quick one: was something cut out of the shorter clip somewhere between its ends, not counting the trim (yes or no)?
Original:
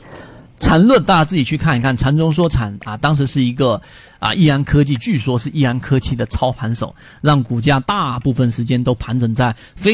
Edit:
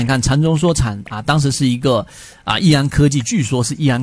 no